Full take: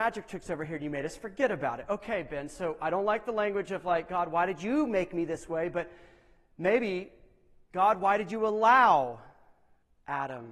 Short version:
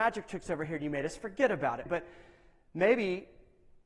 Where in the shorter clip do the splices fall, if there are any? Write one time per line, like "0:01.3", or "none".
0:01.9